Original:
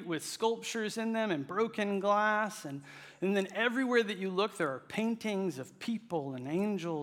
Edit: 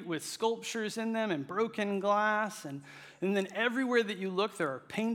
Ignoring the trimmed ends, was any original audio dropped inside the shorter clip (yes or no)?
no